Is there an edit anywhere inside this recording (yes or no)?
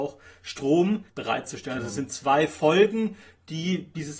yes